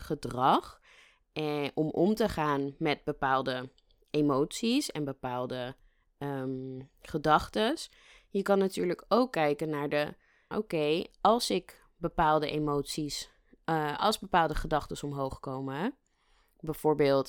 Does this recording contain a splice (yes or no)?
yes